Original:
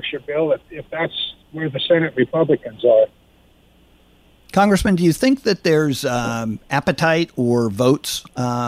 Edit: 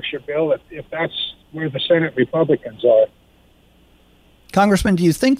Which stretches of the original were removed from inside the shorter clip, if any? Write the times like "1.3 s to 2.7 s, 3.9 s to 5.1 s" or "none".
none